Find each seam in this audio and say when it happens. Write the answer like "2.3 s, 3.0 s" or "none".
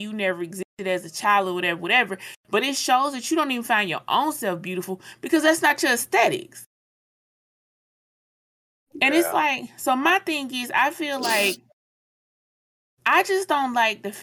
none